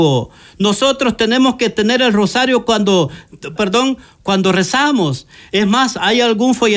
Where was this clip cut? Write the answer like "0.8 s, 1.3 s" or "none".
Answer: 3.6 s

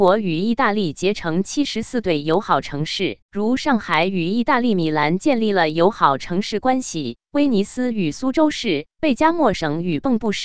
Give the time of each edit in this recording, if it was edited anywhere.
3.2 s, 8.9 s

